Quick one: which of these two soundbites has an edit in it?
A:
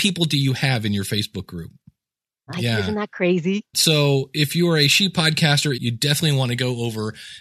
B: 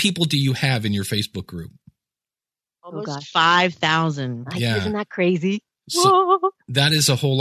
A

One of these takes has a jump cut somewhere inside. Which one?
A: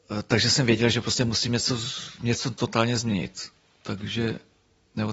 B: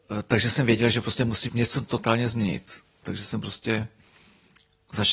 B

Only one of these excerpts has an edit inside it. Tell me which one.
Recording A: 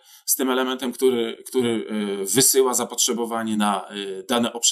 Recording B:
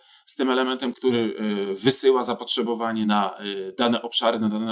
B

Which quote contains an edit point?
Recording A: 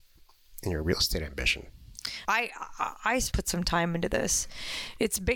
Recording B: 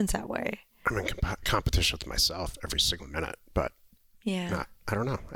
A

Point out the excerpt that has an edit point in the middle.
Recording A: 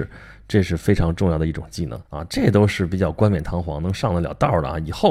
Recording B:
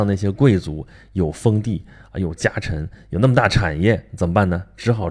A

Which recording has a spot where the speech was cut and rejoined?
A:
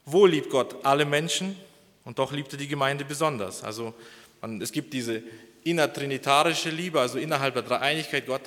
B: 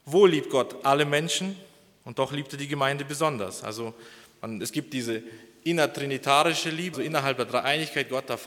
B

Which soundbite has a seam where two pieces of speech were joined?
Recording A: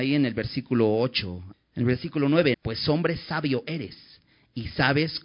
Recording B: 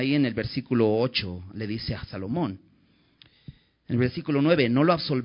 A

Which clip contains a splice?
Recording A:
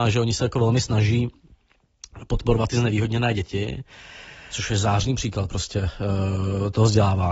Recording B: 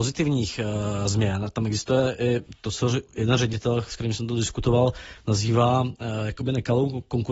A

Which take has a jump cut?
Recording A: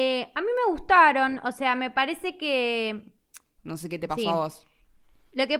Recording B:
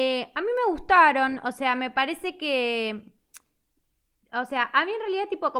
A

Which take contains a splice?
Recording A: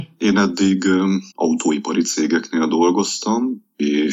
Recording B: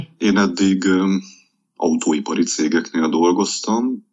A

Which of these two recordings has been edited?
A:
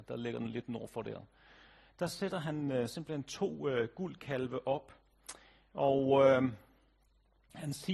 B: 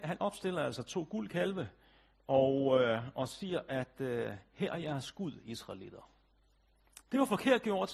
B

